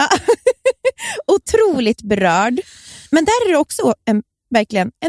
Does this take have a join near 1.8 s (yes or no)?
no